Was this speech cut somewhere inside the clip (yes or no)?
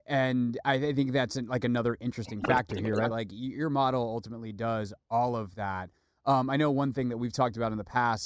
yes